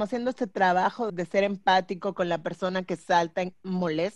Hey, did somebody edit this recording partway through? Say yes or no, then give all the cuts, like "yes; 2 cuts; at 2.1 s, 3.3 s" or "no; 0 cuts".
yes; 1 cut; at 1.1 s